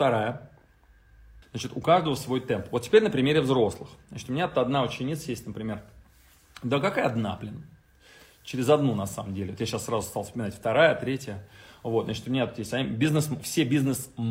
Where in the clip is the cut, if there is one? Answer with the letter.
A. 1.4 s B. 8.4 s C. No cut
A